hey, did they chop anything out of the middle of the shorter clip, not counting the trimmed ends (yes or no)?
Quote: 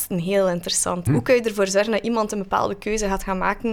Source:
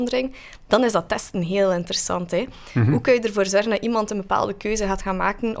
yes